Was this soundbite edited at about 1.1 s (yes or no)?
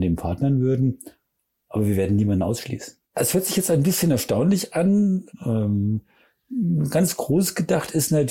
no